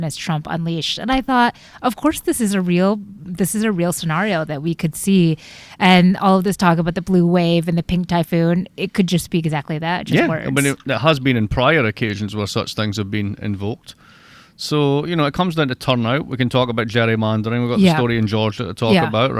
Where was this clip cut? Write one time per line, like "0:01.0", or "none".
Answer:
none